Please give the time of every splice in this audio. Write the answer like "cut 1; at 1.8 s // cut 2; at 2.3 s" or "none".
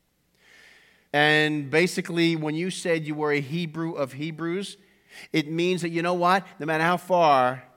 cut 1; at 1.0 s